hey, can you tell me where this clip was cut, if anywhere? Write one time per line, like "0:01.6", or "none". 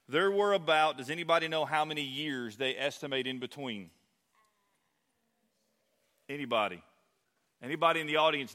none